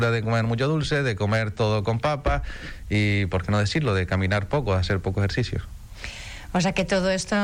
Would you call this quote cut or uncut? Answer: uncut